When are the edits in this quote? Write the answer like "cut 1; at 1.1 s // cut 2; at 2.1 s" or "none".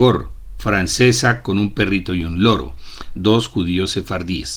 cut 1; at 3.1 s